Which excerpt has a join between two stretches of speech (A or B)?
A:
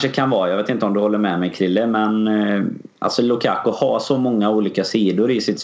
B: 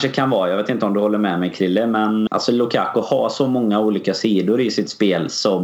B